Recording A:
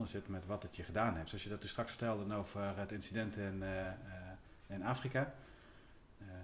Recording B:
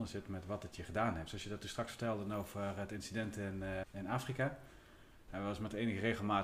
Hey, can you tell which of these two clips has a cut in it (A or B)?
B